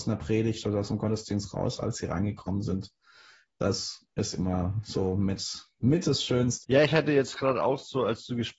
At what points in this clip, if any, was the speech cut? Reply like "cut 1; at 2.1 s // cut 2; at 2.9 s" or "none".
cut 1; at 6.6 s